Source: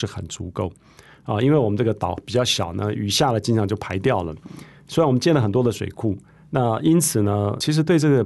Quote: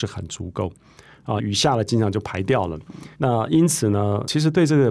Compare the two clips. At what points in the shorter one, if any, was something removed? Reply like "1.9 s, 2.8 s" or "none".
1.4 s, 3.1 s